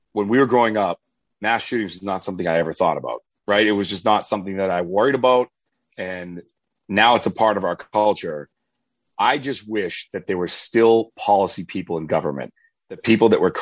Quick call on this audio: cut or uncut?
uncut